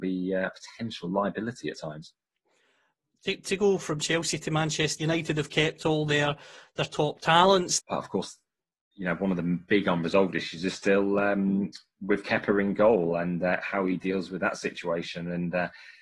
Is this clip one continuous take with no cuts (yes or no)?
no